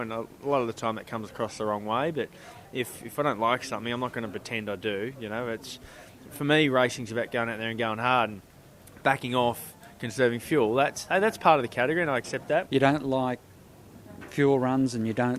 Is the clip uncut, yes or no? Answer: no